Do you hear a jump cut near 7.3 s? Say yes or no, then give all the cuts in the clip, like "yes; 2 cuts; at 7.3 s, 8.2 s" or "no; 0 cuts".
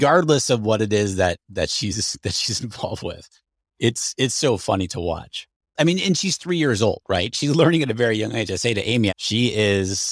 no; 1 cut; at 9.1 s